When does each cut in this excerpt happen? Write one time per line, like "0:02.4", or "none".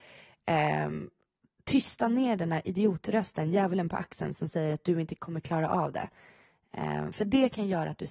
none

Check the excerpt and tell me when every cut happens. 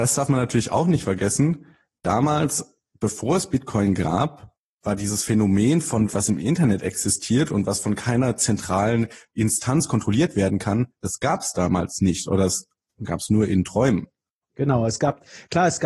0:06.1

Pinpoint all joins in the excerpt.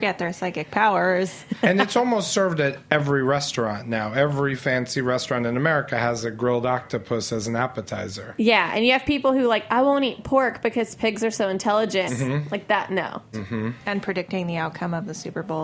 0:12.1
0:13.3

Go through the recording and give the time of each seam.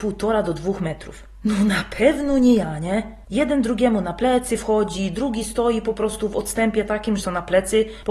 0:03.2
0:07.2

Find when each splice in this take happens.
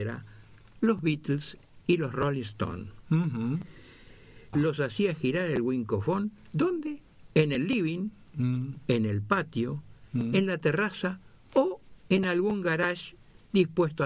0:04.5

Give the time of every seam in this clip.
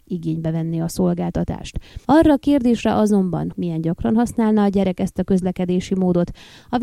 0:02.0
0:03.5

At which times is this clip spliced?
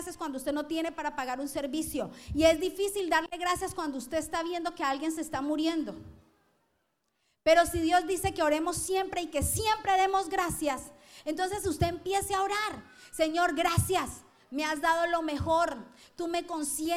none

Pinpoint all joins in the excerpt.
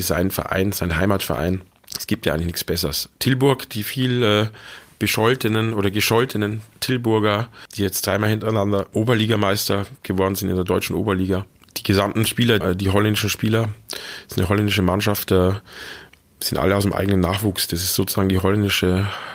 0:12.6

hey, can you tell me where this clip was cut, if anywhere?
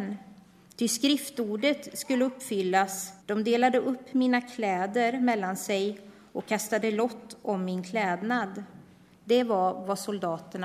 0:03.2

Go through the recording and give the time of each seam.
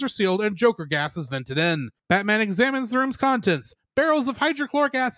0:02.0

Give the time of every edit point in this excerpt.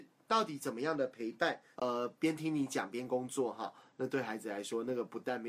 0:01.7

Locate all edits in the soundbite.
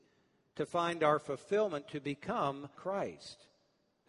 0:02.7

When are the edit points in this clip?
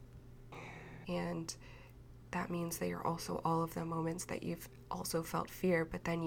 0:01.0

